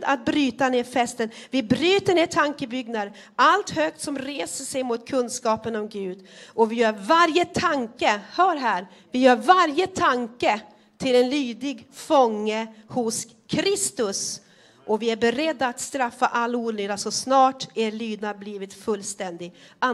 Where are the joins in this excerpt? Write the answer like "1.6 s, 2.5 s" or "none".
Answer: none